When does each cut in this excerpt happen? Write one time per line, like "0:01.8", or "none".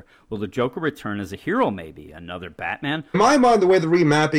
0:03.1